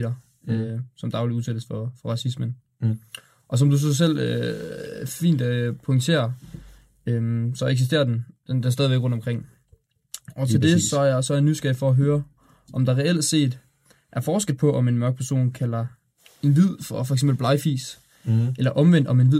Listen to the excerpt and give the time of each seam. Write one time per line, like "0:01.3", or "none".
none